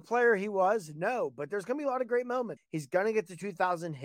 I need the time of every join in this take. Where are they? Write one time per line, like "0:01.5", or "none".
0:02.6

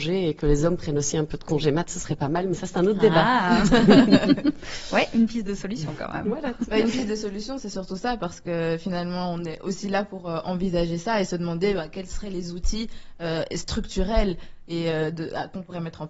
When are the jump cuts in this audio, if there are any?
none

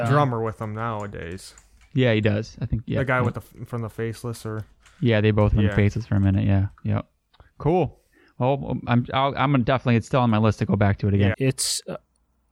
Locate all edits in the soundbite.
0:11.3

